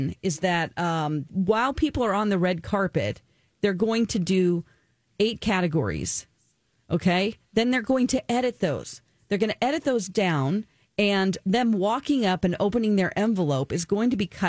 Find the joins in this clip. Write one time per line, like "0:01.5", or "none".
0:01.3